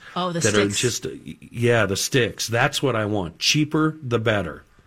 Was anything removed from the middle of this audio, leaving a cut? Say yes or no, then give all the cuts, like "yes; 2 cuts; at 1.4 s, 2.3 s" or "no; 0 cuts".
no; 0 cuts